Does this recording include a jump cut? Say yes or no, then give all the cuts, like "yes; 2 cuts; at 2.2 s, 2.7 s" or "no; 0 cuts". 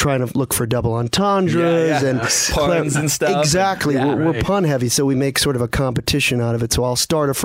no; 0 cuts